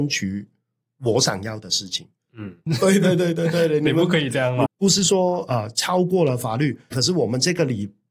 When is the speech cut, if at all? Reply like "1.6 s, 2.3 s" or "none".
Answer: 2.7 s, 4.7 s, 6.9 s

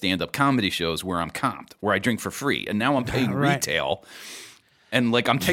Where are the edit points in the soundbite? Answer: none

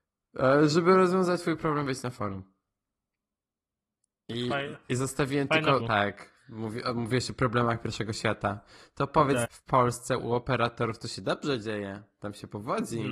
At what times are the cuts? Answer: 5.8 s, 9.4 s

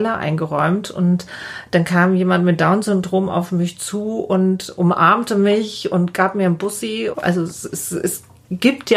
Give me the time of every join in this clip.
7.1 s

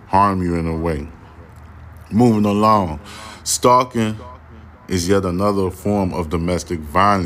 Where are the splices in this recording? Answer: none

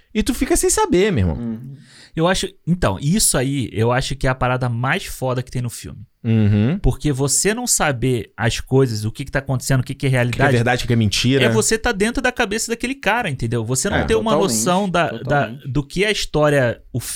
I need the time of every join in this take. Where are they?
none

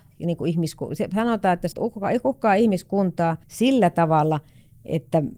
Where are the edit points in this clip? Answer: 1.7 s, 3.4 s

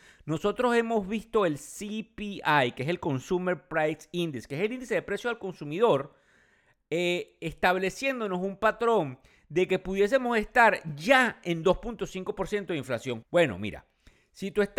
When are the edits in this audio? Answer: 13.2 s

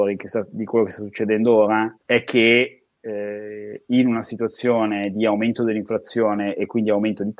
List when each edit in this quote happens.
2.0 s

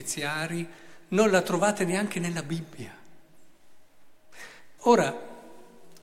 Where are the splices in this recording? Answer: 4.8 s

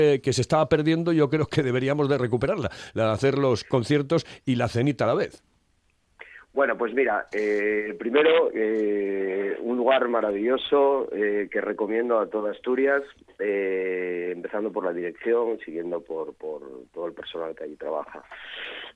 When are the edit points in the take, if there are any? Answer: none

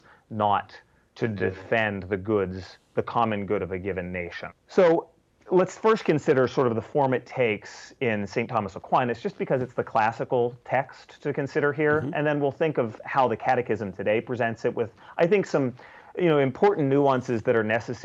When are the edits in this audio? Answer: 4.5 s

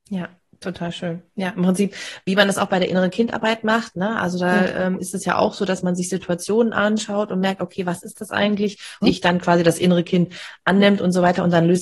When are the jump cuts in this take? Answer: 9.0 s

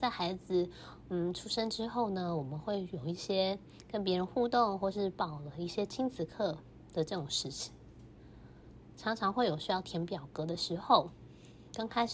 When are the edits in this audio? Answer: none

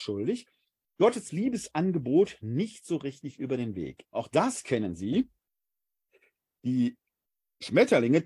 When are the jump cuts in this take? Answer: 4.1 s

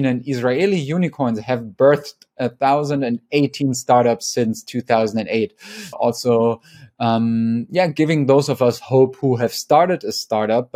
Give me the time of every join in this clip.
5.9 s

